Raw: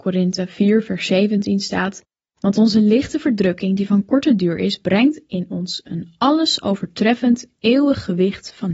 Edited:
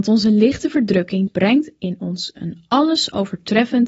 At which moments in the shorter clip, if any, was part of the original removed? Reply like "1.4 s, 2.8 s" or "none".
1.3 s